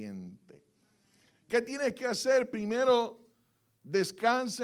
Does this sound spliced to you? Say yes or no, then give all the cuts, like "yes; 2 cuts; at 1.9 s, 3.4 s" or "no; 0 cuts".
no; 0 cuts